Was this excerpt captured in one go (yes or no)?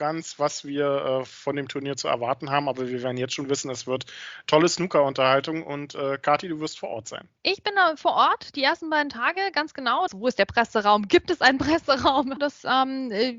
no